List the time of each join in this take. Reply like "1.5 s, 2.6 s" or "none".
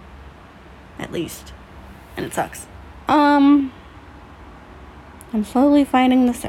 3.1 s